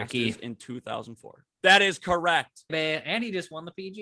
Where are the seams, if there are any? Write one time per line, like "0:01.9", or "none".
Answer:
0:01.6
0:02.7

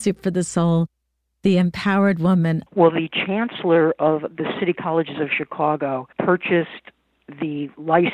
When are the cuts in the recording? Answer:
0:02.7
0:06.1

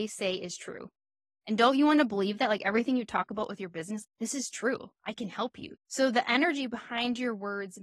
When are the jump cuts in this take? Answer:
0:04.0
0:05.7

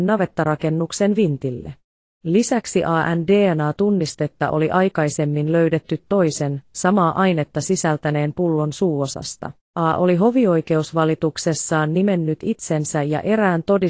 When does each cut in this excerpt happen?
0:09.7

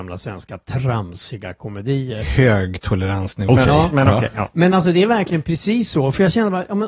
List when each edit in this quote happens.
0:03.5

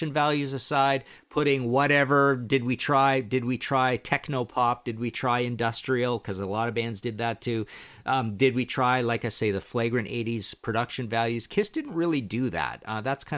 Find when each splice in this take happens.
none

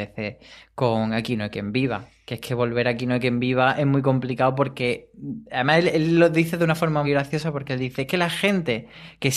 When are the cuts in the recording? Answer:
0:07.0

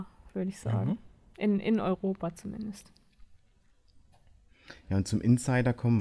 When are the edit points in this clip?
none

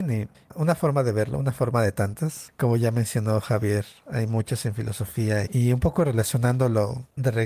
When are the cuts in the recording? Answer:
0:05.5

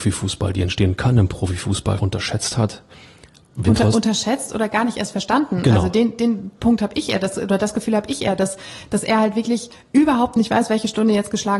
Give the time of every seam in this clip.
0:02.0

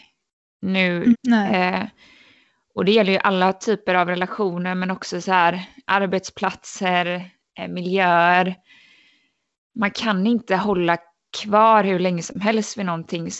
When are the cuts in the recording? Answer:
0:01.1

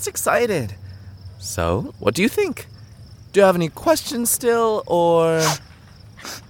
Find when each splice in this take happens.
0:01.9

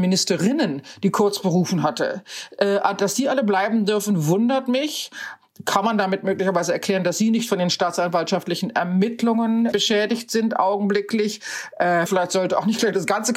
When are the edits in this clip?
0:09.7
0:12.1

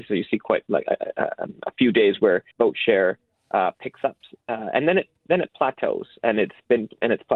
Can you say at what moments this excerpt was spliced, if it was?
0:02.5

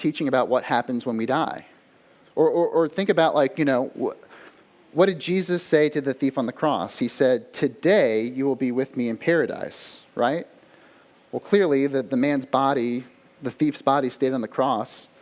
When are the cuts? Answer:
none

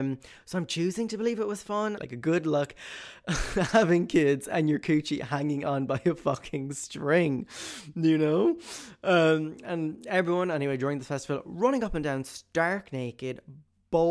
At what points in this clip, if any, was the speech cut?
0:02.0

